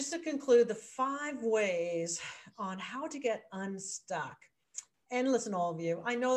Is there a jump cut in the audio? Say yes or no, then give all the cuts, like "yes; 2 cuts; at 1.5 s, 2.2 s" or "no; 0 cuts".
no; 0 cuts